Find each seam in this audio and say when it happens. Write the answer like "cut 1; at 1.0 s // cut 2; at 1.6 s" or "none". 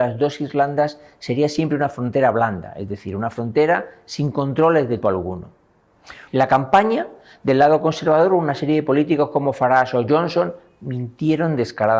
cut 1; at 5.0 s // cut 2; at 6.3 s

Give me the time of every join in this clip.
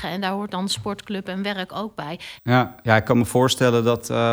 cut 1; at 2.4 s

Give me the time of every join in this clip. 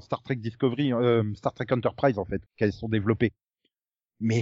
cut 1; at 2.5 s

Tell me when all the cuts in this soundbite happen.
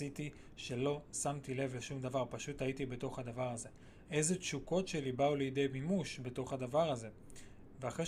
cut 1; at 4.0 s

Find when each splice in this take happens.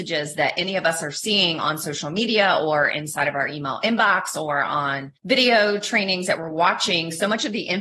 cut 1; at 5.2 s

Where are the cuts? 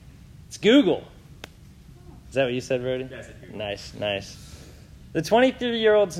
none

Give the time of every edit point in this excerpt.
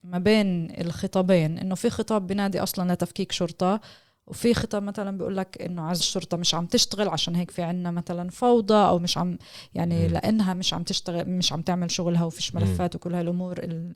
cut 1; at 6.0 s

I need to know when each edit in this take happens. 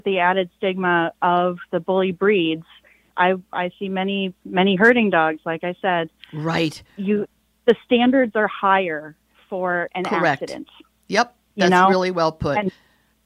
cut 1; at 3.1 s

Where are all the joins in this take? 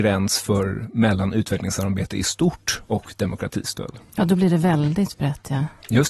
none

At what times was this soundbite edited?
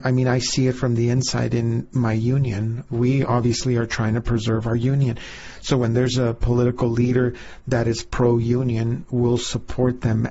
cut 1; at 2.9 s

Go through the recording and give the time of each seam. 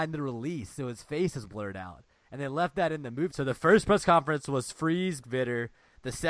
cut 1; at 3.3 s // cut 2; at 5.2 s

